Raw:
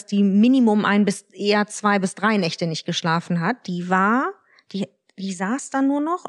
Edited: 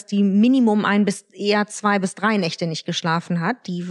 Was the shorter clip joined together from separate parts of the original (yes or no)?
no